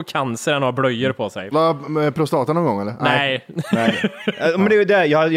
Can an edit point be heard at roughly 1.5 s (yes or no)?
yes